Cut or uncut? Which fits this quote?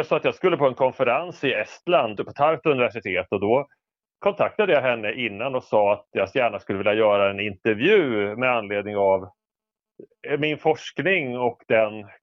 cut